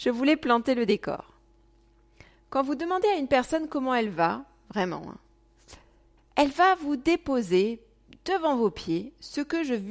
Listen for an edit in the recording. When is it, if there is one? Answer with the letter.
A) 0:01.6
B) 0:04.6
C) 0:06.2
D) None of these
C